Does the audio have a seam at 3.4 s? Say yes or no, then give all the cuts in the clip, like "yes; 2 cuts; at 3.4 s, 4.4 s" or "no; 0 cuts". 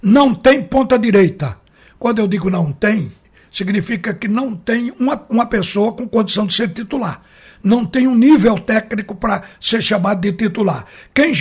no; 1 cut; at 5.3 s